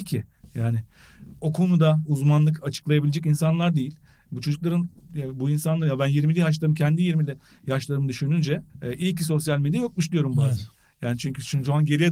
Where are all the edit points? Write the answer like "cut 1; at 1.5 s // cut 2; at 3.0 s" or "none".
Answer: cut 1; at 8.7 s